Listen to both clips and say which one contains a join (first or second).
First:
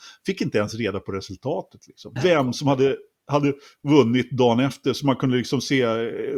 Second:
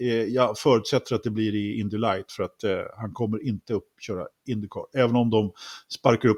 first